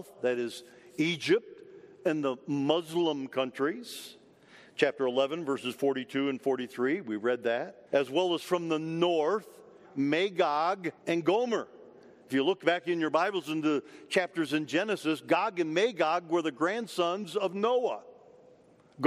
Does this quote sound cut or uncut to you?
cut